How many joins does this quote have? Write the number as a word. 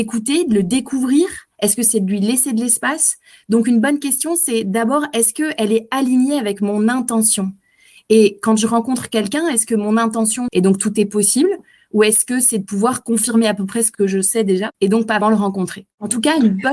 two